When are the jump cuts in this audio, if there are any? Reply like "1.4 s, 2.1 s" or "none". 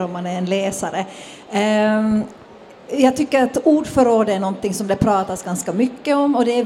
none